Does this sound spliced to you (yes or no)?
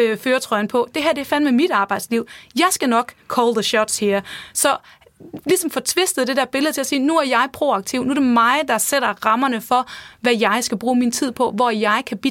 no